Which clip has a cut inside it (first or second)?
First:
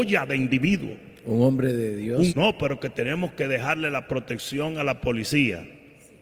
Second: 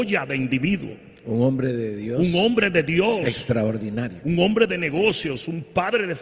first